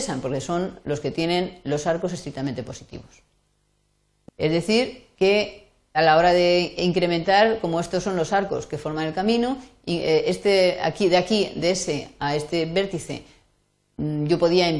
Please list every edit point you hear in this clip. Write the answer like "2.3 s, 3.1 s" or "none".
4.2 s, 5.9 s